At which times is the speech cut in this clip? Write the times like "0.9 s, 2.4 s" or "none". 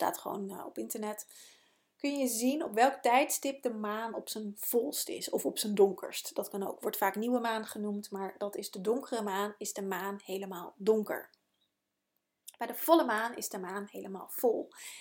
none